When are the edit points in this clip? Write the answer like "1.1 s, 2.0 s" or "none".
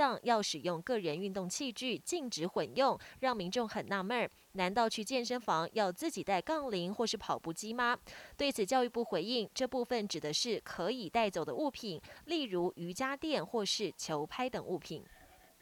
none